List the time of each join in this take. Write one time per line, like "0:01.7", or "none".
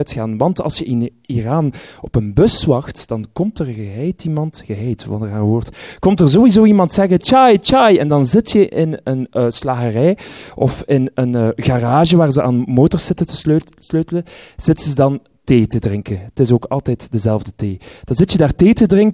0:07.2